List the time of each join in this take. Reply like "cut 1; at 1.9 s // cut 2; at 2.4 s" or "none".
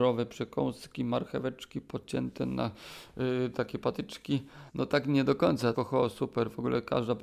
cut 1; at 4.7 s // cut 2; at 5.8 s

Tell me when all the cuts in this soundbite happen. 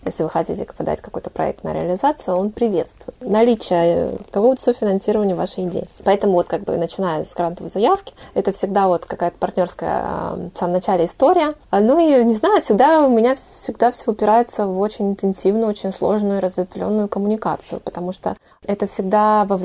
cut 1; at 3.2 s

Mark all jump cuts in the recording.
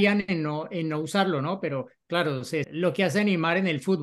cut 1; at 2.6 s

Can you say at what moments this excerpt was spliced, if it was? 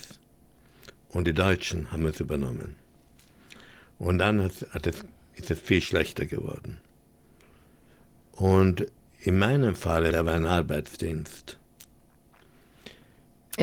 cut 1; at 10.1 s

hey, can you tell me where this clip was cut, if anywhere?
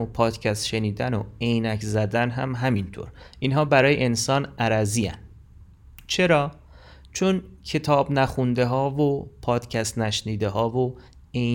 none

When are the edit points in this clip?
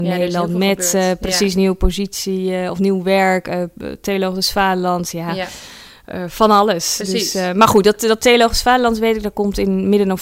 none

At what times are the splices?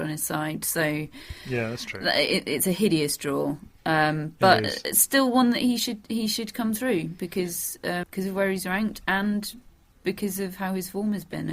cut 1; at 8.0 s

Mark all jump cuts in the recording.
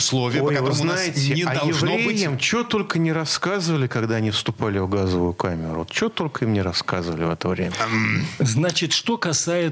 none

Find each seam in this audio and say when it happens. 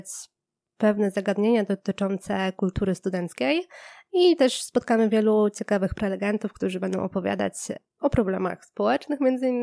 cut 1; at 8.0 s

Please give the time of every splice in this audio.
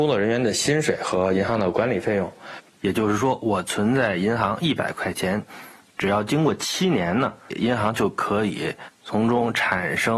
cut 1; at 2.7 s

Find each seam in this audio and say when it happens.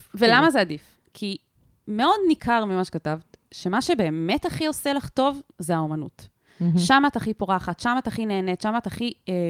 none

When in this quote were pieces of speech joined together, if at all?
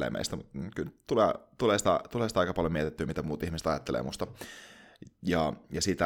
none

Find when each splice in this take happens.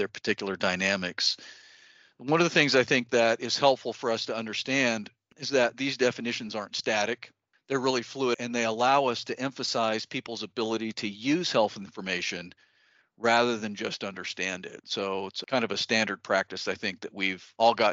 none

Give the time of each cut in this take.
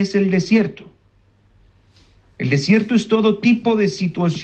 none

